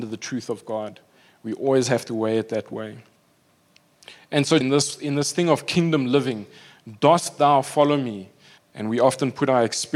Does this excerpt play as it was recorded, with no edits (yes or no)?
no